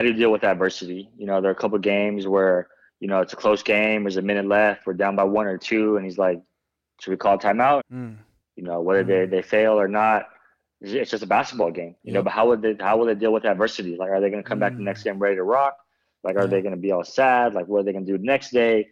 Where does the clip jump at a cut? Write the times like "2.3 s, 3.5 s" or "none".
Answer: 7.8 s